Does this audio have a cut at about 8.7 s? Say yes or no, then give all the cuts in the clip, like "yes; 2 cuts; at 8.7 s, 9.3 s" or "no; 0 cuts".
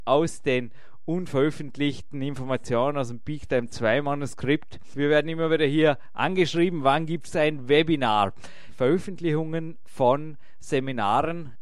yes; 2 cuts; at 4.9 s, 8.7 s